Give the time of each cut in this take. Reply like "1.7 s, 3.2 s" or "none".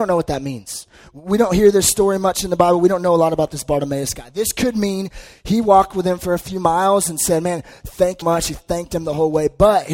8.2 s